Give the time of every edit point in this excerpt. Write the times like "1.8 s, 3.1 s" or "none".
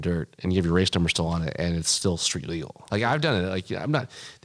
2.9 s